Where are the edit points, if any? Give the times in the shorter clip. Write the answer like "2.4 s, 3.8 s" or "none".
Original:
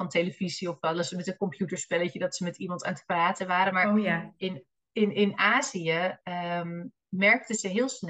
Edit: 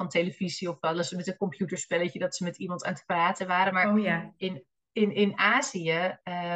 none

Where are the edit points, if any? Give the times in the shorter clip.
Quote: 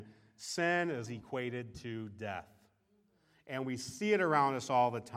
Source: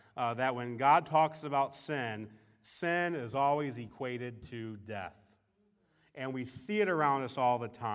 1.1 s

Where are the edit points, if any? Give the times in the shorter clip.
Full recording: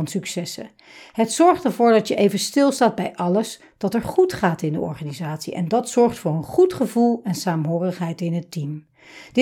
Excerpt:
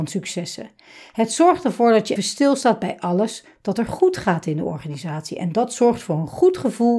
2.2 s

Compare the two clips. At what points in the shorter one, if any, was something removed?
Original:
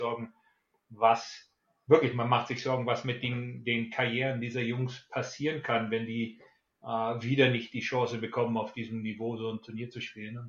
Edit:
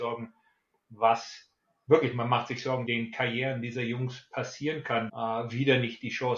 2.9 s, 5.1 s

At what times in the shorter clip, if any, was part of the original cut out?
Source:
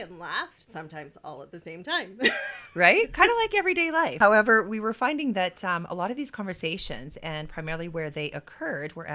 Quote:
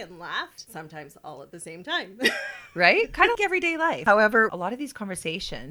3.3 s, 4.5 s

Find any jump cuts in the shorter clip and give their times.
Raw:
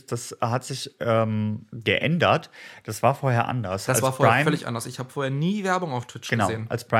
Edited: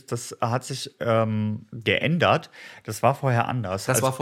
none

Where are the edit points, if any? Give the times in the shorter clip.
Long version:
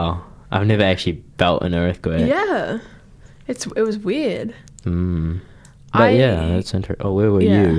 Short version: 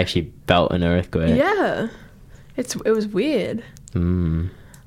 none

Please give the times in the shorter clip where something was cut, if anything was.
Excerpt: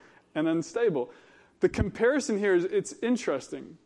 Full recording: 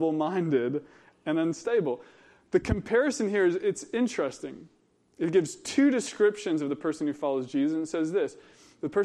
none

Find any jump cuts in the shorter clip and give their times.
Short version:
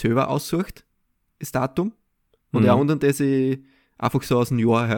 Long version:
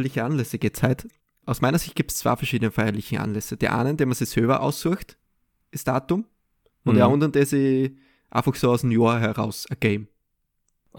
none

